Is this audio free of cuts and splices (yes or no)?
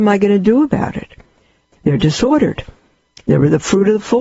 no